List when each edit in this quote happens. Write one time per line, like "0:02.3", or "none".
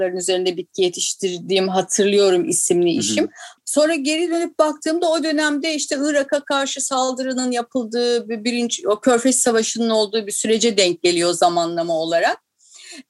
0:03.6